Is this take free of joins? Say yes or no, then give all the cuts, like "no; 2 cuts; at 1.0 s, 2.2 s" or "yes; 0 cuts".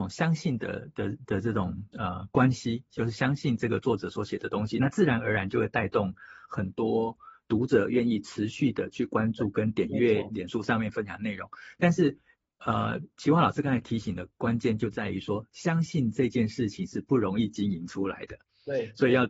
yes; 0 cuts